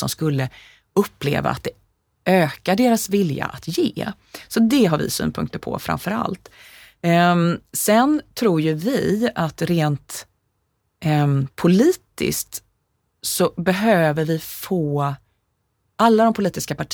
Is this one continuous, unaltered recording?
yes; 0 cuts

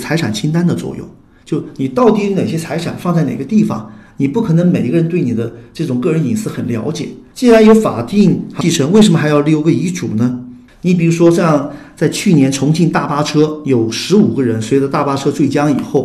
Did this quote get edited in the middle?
yes; 2 cuts; at 7.3 s, 10.7 s

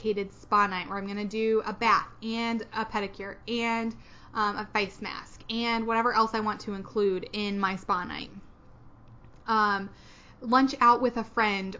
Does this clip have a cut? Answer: no; 0 cuts

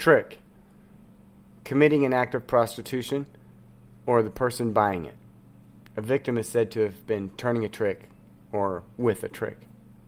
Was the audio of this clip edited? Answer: no; 0 cuts

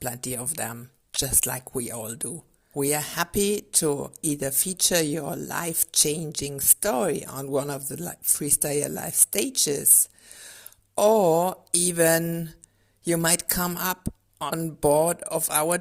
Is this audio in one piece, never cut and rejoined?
no; 1 cut; at 2.7 s

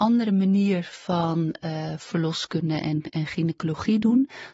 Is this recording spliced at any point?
no; 0 cuts

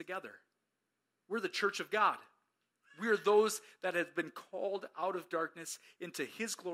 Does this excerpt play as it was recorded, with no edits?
yes; 0 cuts

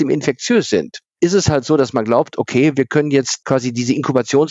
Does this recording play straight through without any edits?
yes; 0 cuts

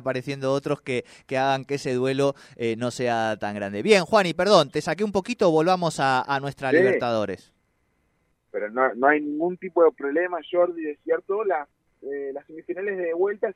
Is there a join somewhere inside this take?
no; 0 cuts

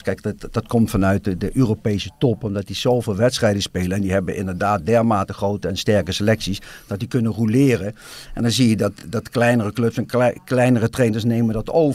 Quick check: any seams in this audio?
no; 0 cuts

